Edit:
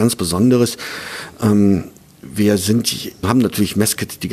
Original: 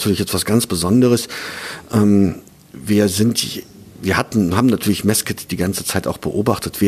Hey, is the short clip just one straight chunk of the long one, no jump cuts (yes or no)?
no